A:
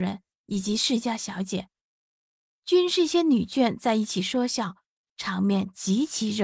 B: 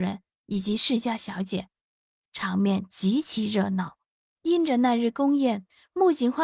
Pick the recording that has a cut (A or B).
B